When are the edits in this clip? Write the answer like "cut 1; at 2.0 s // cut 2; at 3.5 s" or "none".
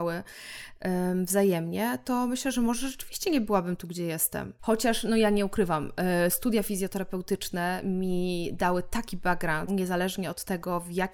cut 1; at 4.6 s // cut 2; at 9.7 s